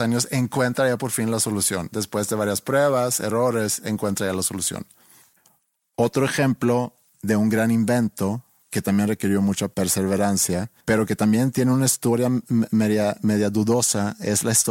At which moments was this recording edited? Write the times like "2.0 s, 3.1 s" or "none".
10.8 s